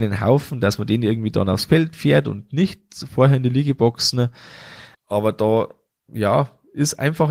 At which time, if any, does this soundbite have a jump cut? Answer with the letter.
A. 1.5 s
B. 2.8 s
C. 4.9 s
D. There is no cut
C